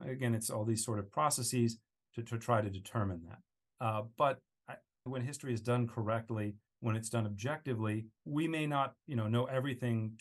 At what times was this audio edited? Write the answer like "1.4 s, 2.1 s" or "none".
3.6 s, 5.1 s, 8.2 s

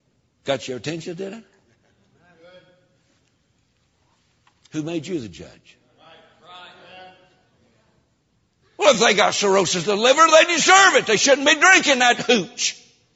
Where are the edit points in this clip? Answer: none

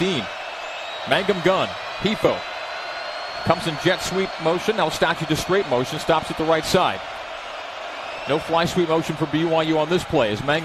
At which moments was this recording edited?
none

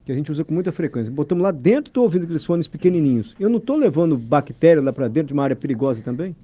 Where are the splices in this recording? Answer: none

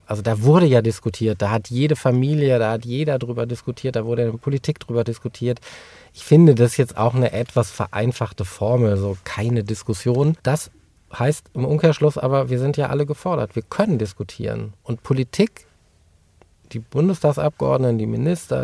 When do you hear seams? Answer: 10.4 s

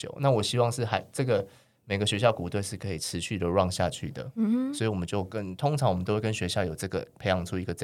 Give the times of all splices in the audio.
none

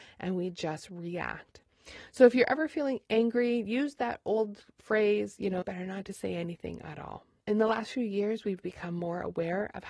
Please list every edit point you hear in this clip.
5.6 s, 7.4 s, 8.6 s

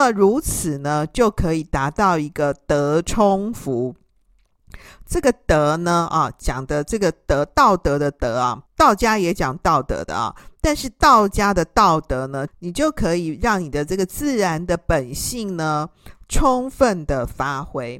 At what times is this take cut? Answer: 8.7 s, 12.5 s

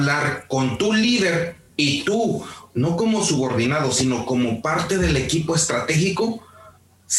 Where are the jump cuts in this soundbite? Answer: none

